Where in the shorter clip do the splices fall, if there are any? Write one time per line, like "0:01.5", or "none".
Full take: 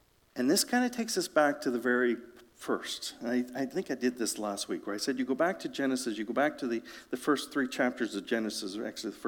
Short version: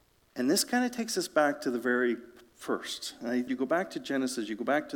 0:03.5